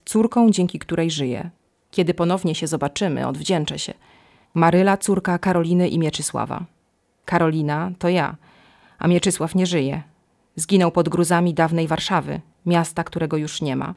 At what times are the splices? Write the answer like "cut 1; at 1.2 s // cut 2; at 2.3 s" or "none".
cut 1; at 1.8 s // cut 2; at 4.4 s